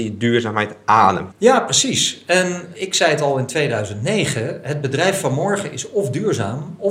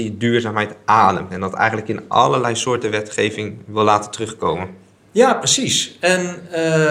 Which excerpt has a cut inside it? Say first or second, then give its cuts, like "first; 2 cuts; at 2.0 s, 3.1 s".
first; 3 cuts; at 1.3 s, 2.7 s, 4.6 s